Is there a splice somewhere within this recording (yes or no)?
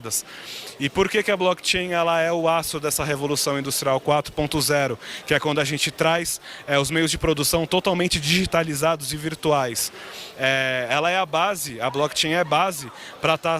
no